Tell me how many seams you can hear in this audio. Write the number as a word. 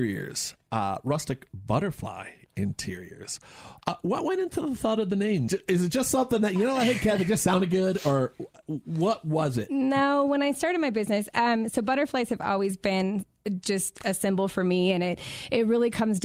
one